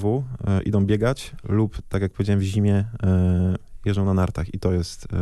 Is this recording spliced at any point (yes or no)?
no